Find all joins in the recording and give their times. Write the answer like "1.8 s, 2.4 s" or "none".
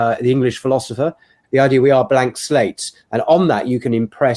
1.4 s